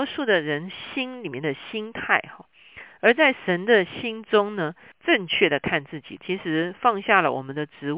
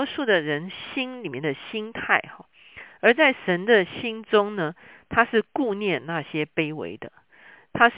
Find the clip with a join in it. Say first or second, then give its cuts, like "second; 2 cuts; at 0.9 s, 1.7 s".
first; 2 cuts; at 4.9 s, 6.2 s